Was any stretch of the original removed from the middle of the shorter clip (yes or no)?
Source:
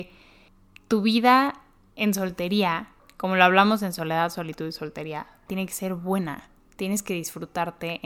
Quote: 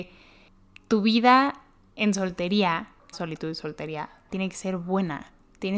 yes